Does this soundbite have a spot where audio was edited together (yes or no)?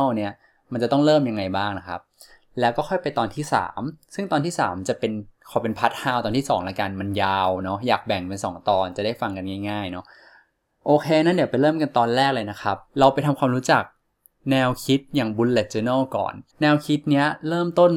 yes